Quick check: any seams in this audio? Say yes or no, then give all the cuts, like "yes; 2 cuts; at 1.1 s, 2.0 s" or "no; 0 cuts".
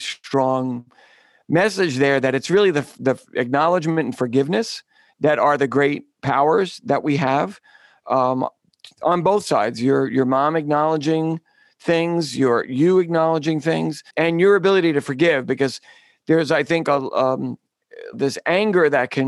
yes; 2 cuts; at 14.1 s, 18.1 s